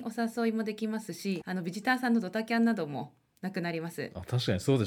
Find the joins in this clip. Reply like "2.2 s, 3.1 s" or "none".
1.4 s

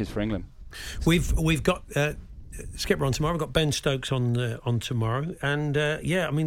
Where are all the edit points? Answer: none

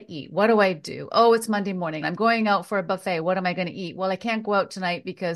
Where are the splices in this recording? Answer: 2.0 s

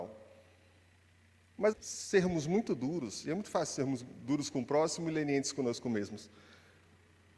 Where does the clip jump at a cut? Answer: 1.7 s

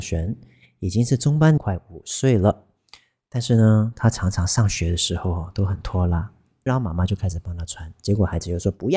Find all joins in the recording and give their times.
1.6 s, 6.7 s

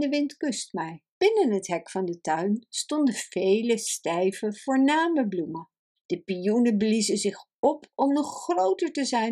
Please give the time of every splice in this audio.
1.1 s, 6.0 s

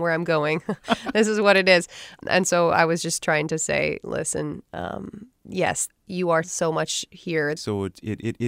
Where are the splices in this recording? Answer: 6.4 s, 7.6 s

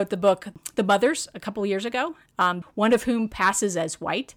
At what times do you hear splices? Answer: 2.6 s

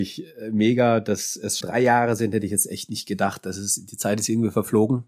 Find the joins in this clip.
1.6 s

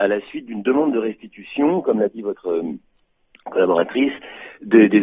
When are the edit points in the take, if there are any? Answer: none

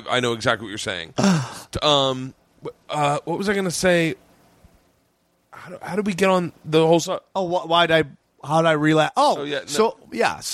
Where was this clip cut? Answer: 7.3 s

